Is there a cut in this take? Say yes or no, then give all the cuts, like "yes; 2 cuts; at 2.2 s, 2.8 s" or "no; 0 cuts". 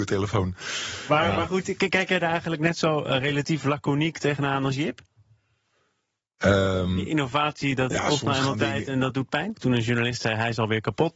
yes; 2 cuts; at 7.9 s, 9.5 s